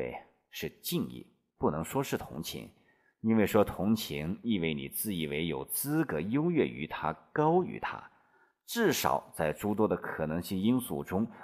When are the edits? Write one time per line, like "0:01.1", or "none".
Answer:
none